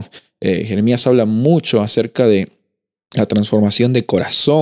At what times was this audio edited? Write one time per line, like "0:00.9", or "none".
none